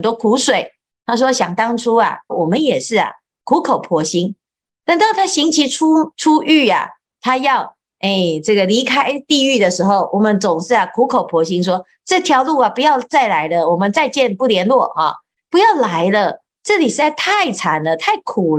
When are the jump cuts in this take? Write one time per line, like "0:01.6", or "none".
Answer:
0:02.3
0:06.1